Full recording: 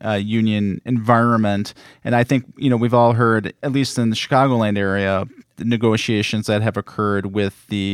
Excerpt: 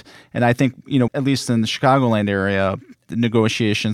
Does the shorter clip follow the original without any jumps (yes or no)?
no